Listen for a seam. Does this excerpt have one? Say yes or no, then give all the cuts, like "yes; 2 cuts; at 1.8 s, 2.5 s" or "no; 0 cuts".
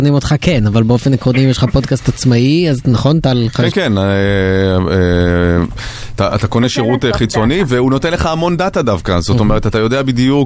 yes; 1 cut; at 3.7 s